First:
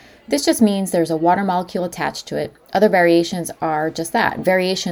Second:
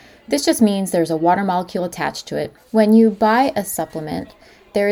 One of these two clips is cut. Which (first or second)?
second